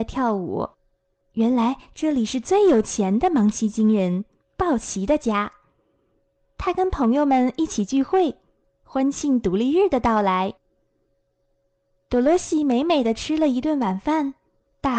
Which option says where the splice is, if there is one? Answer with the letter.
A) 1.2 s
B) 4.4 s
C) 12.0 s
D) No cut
A